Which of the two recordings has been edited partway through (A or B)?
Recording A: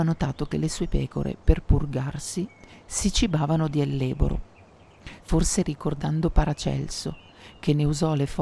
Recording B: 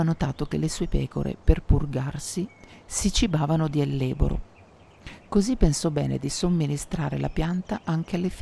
A